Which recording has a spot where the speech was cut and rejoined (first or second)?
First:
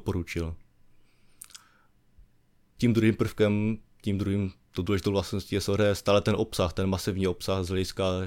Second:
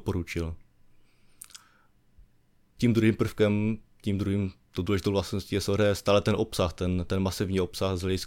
first